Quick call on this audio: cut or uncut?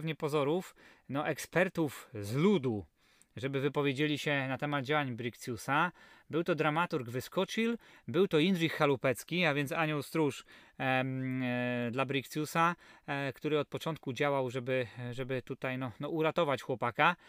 uncut